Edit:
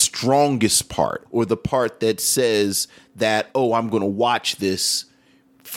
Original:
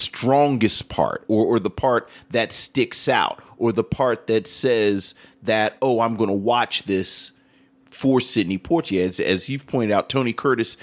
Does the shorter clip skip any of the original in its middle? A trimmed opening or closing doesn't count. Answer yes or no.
yes